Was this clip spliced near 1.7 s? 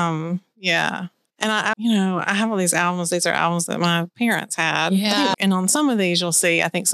yes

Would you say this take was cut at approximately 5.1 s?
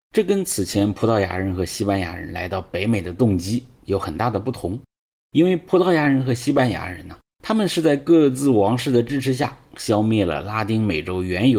no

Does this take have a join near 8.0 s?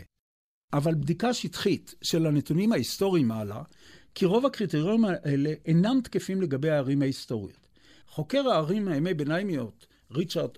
yes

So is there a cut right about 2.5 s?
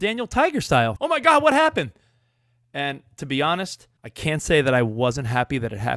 no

